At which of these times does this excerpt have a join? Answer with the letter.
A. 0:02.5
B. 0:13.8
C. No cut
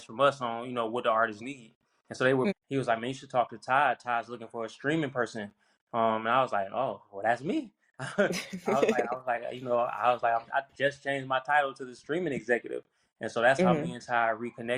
A